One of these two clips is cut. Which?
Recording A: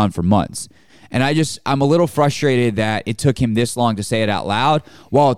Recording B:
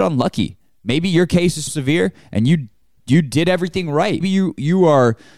B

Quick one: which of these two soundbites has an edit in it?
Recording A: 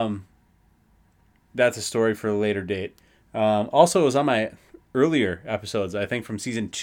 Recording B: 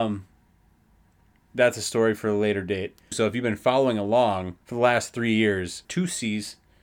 B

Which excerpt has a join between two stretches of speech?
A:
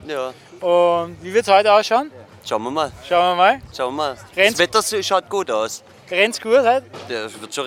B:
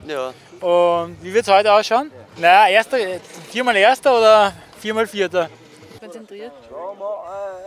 B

